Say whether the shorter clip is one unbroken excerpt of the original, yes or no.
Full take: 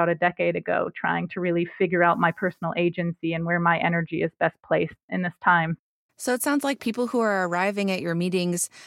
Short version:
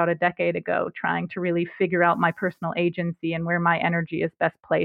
yes